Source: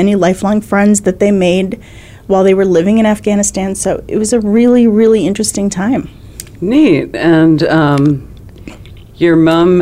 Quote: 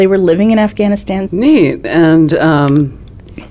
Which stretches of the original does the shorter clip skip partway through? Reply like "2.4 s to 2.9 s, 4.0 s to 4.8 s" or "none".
3.7 s to 6.6 s